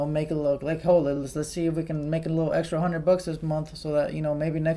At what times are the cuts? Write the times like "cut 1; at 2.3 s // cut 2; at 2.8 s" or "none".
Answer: none